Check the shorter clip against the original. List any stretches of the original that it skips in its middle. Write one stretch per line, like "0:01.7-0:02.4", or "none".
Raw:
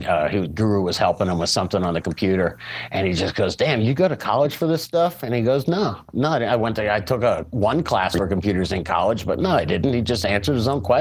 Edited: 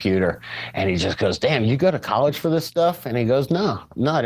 none